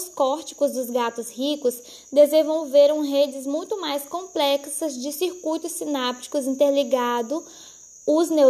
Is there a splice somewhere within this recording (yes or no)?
no